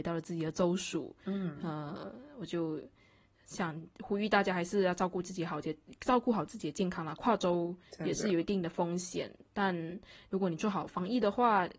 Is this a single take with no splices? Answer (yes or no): yes